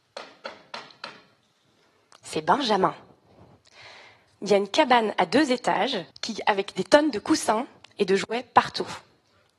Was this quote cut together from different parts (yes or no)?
yes